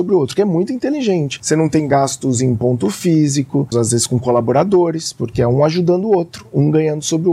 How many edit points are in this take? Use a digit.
1